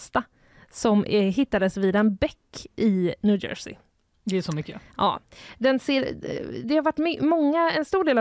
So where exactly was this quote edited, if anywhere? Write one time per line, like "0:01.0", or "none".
0:06.6

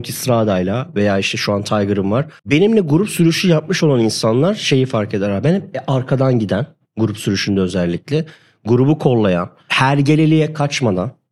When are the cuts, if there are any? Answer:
0:02.4

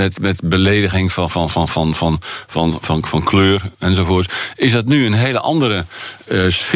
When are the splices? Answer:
none

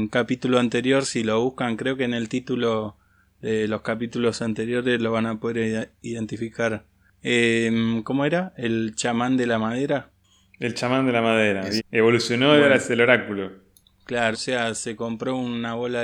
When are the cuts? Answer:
0:11.8
0:14.3

